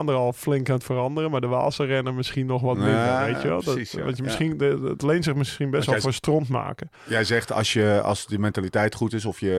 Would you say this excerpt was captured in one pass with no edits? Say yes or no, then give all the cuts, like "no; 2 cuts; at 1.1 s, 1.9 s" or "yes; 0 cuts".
yes; 0 cuts